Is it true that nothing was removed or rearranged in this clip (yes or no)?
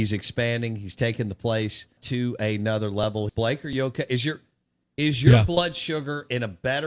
no